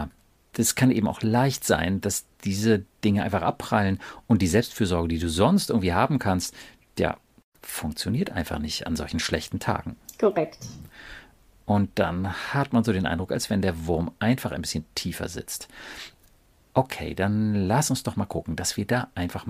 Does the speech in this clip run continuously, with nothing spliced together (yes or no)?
yes